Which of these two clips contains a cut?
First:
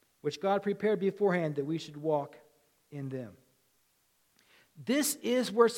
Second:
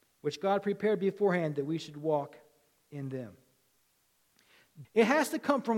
second; 1 cut; at 4.8 s

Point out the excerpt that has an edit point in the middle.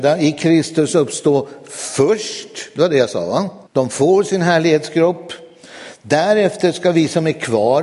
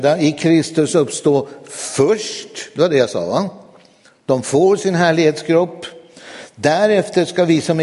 first; 1 cut; at 3.7 s

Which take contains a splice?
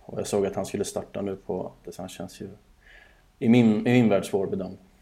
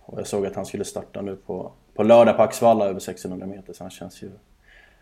first; 1 cut; at 1.8 s

